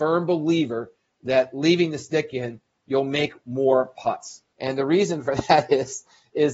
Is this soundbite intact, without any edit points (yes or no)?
no